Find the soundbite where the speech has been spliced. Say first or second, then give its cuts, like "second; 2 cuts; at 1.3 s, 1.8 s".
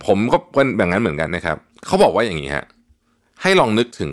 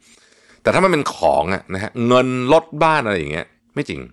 first; 1 cut; at 1.3 s